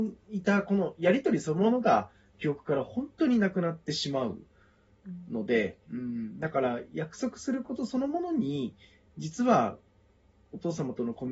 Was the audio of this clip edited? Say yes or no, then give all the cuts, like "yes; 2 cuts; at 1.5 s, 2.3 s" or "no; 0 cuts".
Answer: no; 0 cuts